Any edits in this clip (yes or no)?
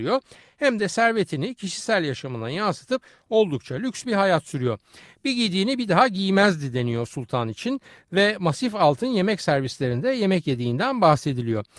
no